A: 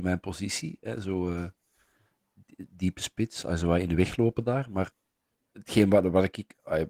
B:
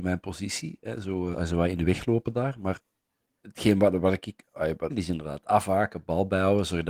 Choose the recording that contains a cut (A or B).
B